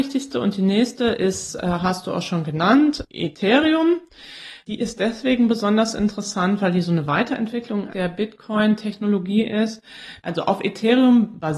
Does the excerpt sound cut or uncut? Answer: cut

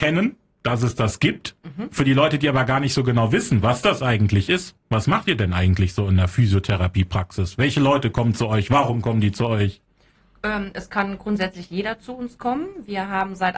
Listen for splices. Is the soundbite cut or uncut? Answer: uncut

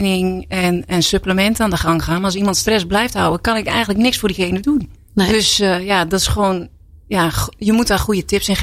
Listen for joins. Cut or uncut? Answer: cut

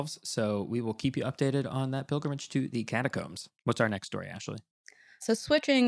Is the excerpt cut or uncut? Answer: cut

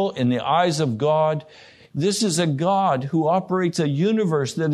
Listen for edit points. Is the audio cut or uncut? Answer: cut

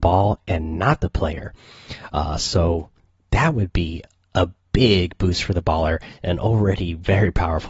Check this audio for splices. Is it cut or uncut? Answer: uncut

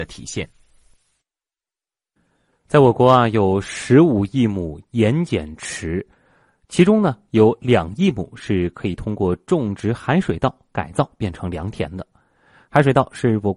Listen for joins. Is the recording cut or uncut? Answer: uncut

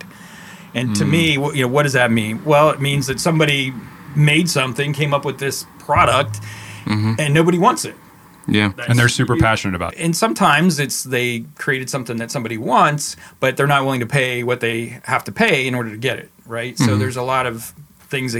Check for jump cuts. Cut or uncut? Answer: cut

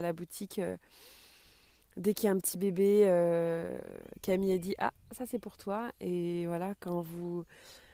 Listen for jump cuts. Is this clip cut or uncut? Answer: uncut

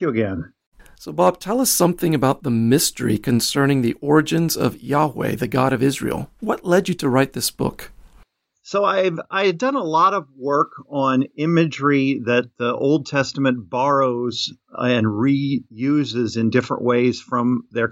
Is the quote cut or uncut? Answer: uncut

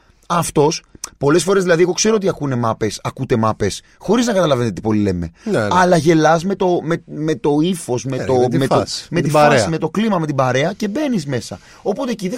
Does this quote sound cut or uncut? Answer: uncut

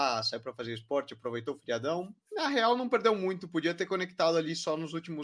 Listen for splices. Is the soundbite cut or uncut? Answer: cut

